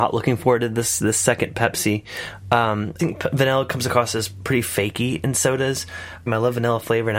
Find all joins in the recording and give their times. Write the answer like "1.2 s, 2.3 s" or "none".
3.0 s, 6.3 s